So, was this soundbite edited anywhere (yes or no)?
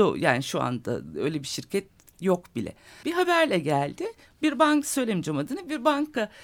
yes